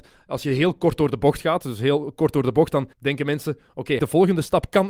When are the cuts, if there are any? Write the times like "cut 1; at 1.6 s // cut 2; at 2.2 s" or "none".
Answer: cut 1; at 2.9 s // cut 2; at 4.0 s